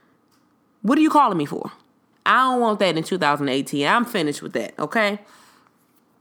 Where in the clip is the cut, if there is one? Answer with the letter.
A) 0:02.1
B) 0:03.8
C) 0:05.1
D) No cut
A